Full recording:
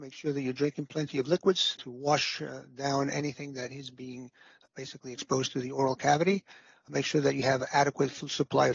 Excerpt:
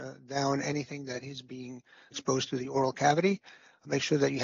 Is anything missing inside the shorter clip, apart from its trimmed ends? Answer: yes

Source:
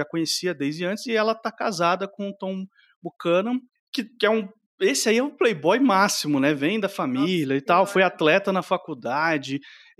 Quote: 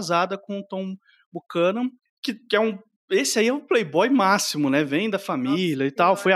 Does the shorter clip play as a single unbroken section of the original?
yes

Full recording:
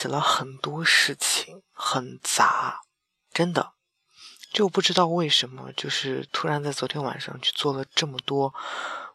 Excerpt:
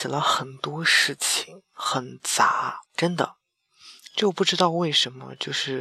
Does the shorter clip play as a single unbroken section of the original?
no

